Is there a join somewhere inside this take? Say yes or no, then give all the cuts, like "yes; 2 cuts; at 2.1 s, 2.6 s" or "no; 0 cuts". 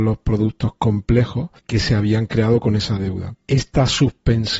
yes; 2 cuts; at 1.6 s, 3.4 s